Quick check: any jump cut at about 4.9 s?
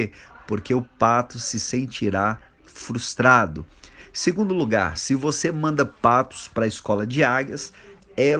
no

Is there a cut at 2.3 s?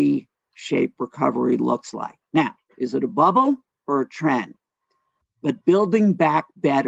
no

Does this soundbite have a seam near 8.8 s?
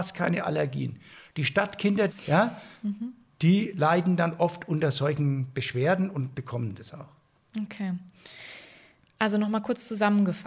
no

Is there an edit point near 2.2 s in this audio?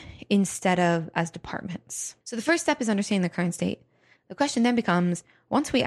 yes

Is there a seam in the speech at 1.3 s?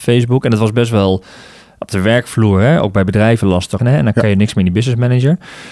no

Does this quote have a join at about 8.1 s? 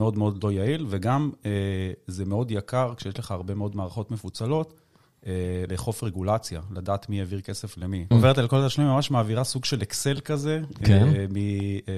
yes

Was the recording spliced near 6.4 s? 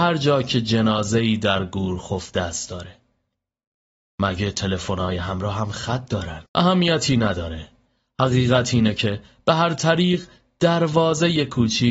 yes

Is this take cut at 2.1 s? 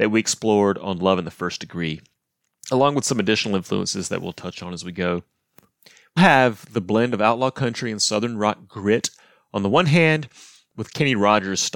no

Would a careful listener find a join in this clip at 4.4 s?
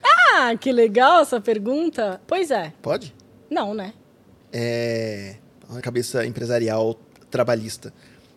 yes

